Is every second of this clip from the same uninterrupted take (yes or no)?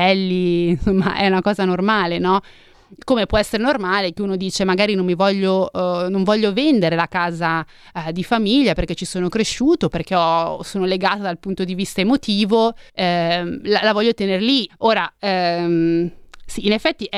no